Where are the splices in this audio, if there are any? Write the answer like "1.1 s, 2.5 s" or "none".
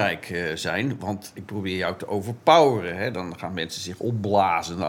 none